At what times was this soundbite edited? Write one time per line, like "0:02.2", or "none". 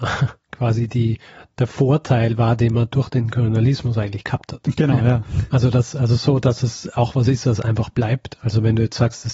none